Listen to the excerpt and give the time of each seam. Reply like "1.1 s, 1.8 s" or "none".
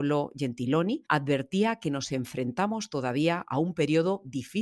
1.1 s